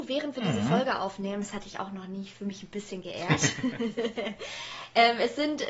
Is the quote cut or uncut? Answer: uncut